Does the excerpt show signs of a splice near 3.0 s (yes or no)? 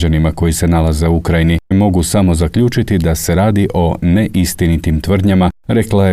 no